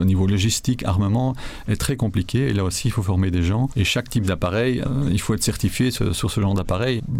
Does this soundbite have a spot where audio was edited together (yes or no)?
no